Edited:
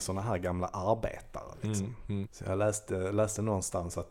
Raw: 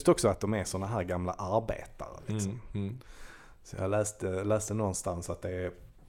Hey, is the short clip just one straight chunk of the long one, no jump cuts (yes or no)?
no